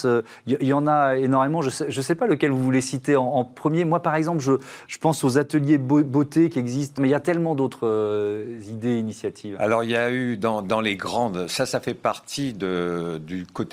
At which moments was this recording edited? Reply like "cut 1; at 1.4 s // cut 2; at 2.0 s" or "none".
cut 1; at 7.0 s